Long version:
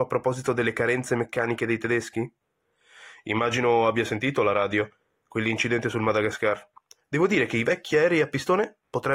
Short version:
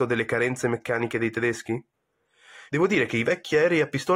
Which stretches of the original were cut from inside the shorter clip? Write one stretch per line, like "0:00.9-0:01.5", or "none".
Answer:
0:03.1-0:07.1